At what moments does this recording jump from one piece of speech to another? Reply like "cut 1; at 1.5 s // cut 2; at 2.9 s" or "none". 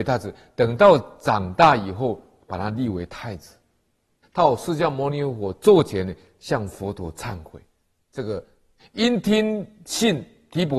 cut 1; at 4.2 s // cut 2; at 8.8 s